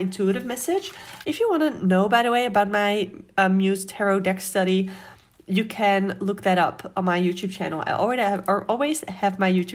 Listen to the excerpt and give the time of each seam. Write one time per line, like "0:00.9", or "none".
0:01.2